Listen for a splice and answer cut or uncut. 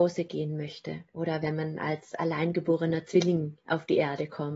cut